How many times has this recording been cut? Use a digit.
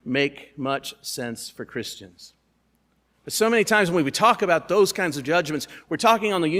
0